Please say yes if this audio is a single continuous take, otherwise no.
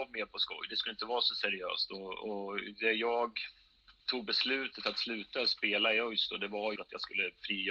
no